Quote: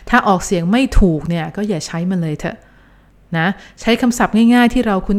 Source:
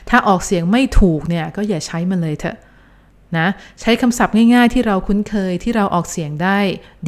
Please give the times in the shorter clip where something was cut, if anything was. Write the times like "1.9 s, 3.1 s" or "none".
none